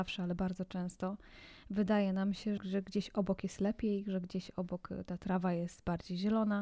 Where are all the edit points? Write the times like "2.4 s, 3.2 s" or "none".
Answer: 2.6 s